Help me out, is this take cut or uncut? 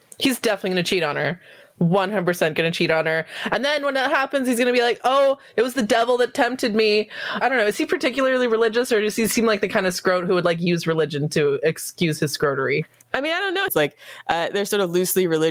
cut